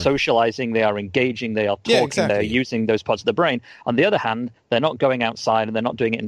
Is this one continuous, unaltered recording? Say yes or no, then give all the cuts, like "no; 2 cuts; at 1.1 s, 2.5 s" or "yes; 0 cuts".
yes; 0 cuts